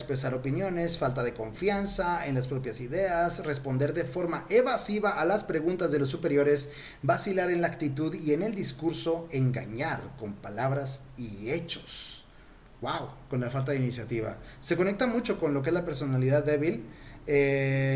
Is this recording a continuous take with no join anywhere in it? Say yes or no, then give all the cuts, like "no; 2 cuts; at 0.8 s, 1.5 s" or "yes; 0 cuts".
yes; 0 cuts